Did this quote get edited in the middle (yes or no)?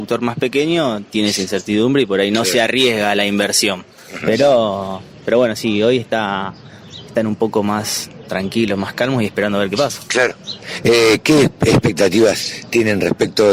no